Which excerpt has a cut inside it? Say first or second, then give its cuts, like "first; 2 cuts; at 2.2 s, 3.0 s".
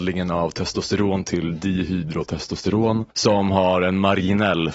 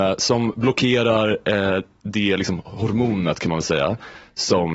first; 1 cut; at 3.1 s